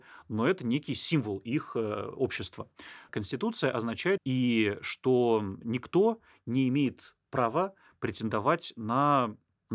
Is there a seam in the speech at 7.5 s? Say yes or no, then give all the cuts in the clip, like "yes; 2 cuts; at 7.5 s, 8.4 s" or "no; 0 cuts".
no; 2 cuts; at 3.1 s, 4.2 s